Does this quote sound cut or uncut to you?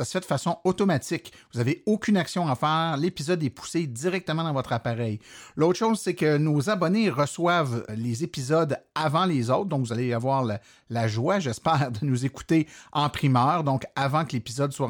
cut